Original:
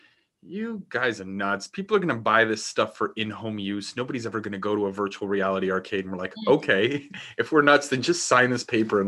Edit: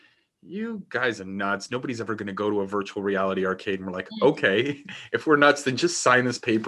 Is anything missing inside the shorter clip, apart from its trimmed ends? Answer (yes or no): yes